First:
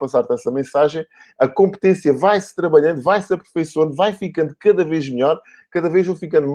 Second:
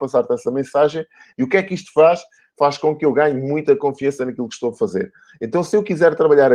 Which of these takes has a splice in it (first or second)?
second